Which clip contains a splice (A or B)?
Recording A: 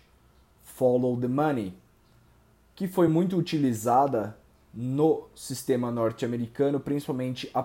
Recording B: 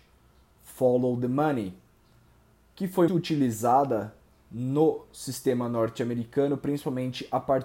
B